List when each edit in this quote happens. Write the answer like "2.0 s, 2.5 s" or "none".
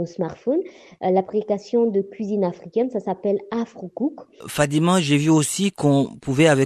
4.4 s